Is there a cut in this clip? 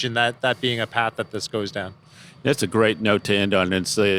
no; 0 cuts

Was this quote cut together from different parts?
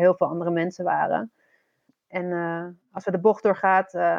yes; 1 cut; at 1.9 s

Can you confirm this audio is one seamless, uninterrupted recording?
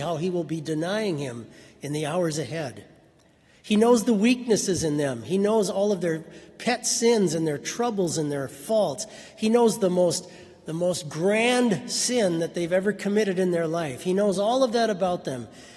yes; 0 cuts

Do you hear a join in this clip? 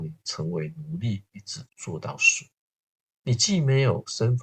yes; 1 cut; at 1.7 s

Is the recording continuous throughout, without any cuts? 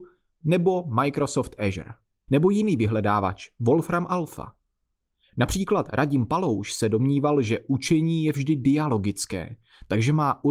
no; 1 cut; at 2.3 s

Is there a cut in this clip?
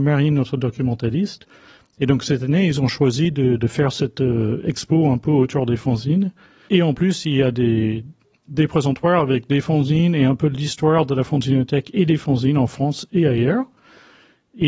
yes; 1 cut; at 6.7 s

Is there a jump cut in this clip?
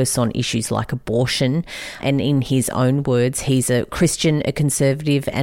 no; 0 cuts

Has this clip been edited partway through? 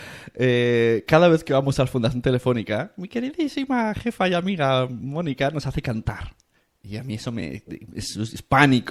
no; 0 cuts

